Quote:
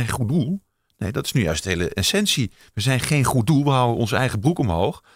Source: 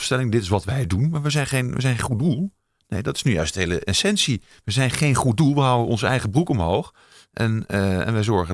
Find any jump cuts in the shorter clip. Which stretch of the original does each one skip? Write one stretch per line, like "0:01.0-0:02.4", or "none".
none